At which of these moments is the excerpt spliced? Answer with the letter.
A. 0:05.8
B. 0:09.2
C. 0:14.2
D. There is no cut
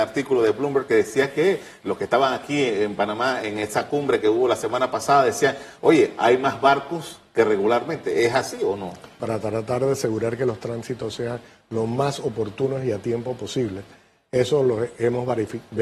B